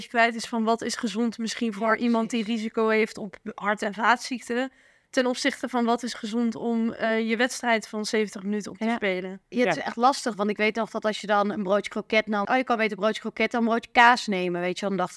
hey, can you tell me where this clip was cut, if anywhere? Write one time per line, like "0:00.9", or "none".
0:09.4
0:12.4